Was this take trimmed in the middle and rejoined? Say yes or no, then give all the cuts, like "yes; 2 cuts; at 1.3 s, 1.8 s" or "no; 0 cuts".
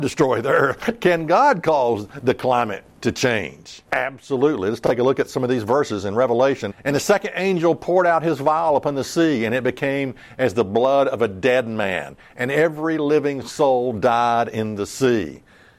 yes; 2 cuts; at 3.9 s, 6.7 s